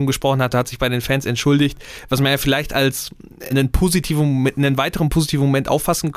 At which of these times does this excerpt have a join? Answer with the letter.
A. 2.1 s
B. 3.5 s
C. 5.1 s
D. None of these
B